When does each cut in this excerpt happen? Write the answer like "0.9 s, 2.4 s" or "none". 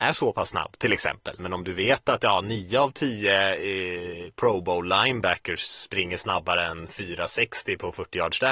1.4 s